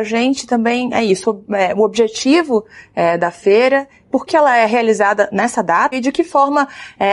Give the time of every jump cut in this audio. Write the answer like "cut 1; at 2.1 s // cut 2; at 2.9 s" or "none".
cut 1; at 4.3 s // cut 2; at 5.9 s